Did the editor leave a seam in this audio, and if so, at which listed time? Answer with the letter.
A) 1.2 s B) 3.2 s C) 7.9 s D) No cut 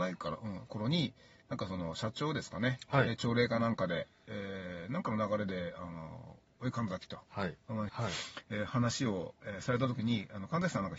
C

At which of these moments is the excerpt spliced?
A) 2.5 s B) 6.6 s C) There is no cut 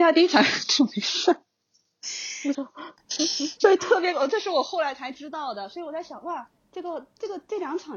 A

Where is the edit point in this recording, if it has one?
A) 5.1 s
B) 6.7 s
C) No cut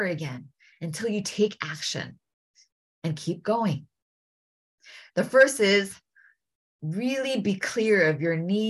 A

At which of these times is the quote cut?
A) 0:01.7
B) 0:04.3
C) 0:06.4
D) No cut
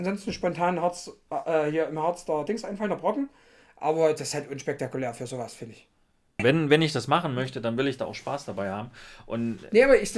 C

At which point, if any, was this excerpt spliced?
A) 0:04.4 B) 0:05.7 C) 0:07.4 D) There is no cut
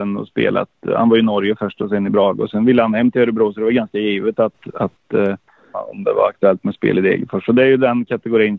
B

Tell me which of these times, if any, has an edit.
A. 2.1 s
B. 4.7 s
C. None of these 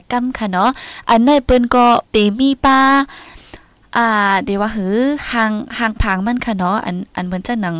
A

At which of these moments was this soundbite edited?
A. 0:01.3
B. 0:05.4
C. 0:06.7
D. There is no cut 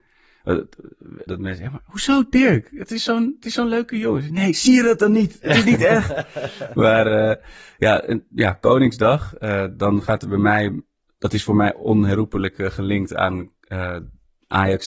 A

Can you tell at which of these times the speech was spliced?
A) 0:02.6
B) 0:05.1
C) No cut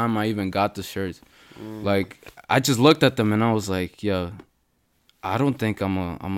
C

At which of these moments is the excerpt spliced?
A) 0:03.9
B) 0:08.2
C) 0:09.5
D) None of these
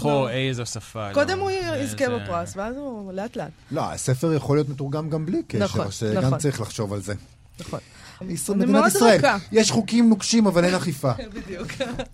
B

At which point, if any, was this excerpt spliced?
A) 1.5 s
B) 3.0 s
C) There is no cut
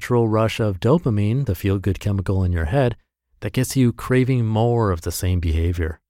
C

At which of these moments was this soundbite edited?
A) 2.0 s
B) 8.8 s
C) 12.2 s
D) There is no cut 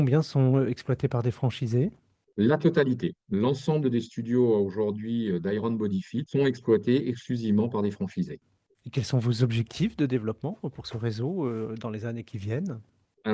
D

